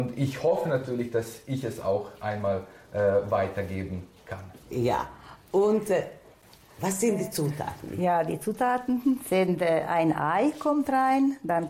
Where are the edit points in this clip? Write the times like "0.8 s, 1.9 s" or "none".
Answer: 4.6 s